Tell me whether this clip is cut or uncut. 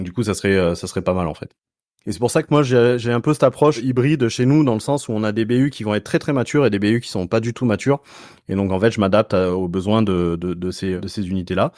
uncut